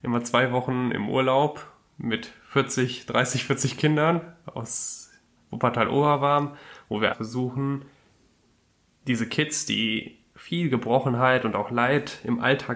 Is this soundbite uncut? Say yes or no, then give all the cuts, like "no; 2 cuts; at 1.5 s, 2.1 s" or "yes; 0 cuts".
no; 1 cut; at 7.1 s